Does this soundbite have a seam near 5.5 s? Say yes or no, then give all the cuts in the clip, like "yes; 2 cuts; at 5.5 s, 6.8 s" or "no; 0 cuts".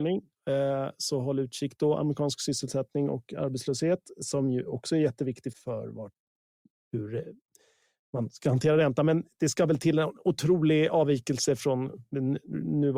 yes; 1 cut; at 5.5 s